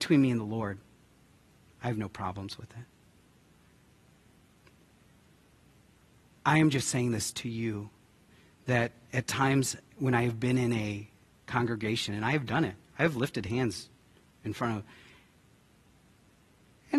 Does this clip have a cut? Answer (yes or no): no